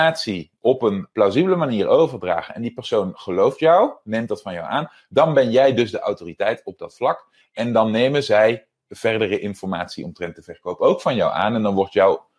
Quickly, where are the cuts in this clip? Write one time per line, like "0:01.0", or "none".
none